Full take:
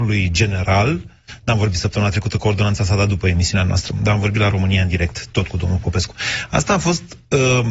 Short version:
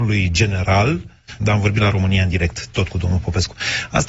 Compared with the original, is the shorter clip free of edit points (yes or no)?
no